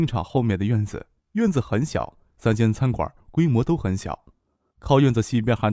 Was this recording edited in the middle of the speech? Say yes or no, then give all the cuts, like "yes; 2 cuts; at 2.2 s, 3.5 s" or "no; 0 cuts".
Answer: no; 0 cuts